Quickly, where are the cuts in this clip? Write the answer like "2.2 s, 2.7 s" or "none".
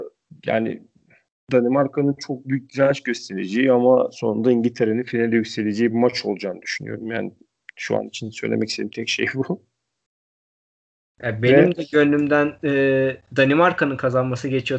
none